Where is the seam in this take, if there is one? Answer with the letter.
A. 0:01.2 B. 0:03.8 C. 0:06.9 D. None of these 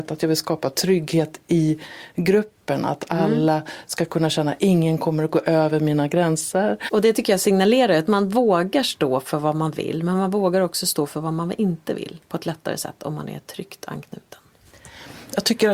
C